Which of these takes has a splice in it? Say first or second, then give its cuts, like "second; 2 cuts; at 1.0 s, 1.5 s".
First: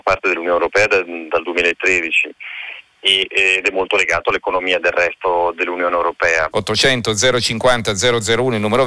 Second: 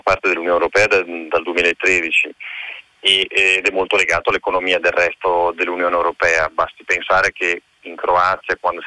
first; 1 cut; at 6.5 s